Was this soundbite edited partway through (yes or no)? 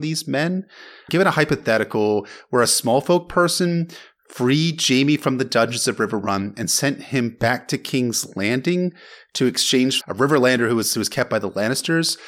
yes